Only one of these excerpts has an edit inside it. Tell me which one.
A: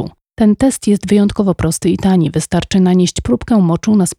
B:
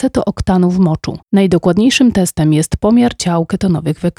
B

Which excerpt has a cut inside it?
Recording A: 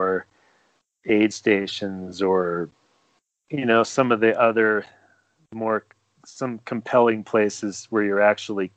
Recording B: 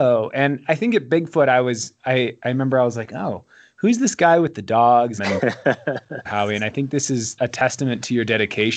B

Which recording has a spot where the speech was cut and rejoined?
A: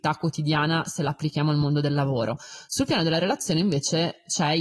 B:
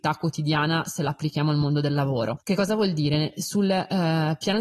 B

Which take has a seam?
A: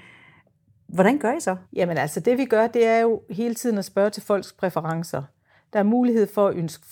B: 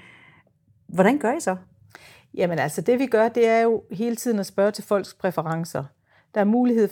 A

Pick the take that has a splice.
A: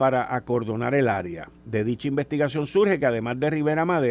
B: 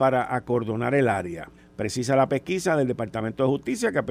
B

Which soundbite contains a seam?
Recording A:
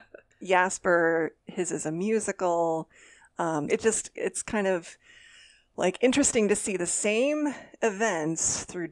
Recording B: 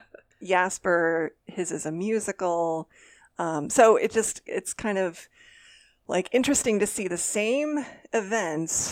A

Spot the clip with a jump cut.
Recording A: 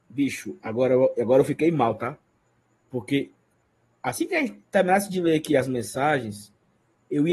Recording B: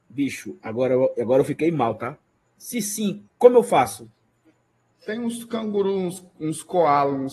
B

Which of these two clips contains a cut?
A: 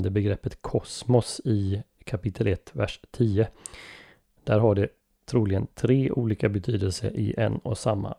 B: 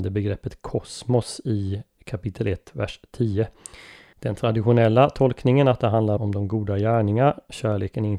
B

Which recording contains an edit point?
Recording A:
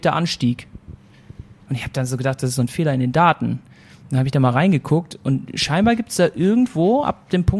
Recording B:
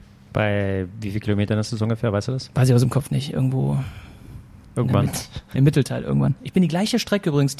B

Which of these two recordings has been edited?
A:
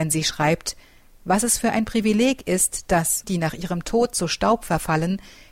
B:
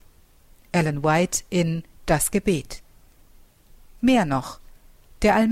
A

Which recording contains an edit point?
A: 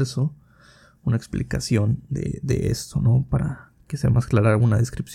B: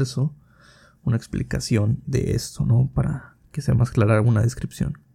B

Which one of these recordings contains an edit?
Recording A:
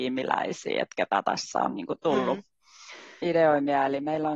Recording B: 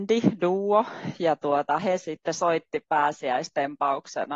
A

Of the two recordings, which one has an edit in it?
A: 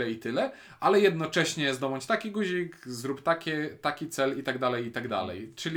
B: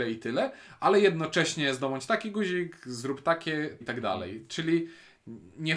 B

